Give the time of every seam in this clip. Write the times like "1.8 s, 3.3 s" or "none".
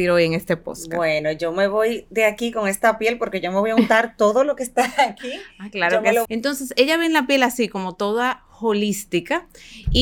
6.2 s